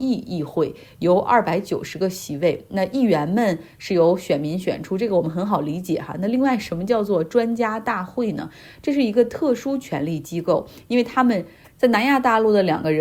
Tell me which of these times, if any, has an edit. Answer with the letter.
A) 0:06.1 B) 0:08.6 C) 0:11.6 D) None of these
C